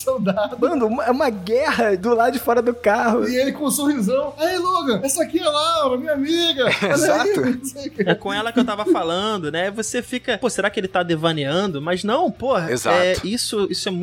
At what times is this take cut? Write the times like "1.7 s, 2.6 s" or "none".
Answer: none